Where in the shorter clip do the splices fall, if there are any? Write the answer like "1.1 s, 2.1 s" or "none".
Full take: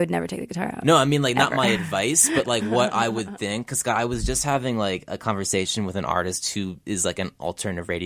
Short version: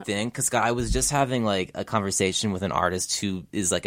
none

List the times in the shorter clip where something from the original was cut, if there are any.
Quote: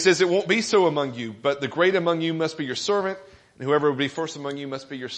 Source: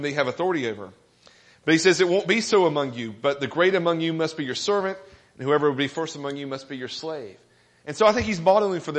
none

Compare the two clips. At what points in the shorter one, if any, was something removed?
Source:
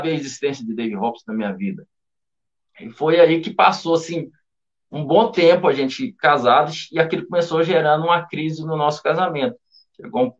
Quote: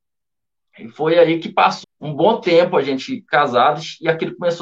1.8 s

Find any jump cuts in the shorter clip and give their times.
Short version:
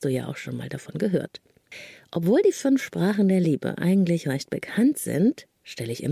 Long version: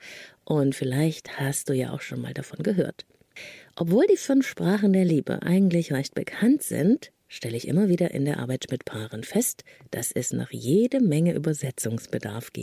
none

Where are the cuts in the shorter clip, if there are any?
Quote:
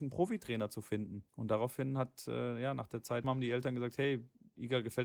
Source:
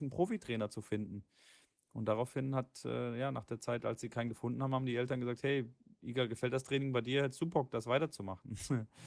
1.3 s, 3.2 s

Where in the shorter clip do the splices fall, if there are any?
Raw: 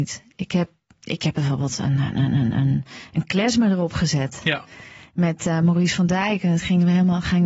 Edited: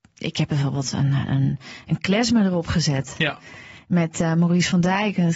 1.3 s

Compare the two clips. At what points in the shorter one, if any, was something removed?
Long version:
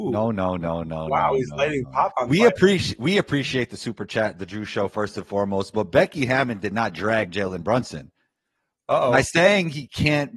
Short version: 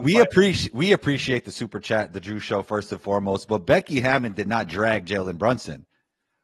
none

